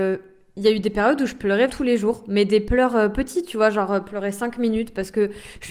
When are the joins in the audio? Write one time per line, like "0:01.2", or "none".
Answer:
0:01.7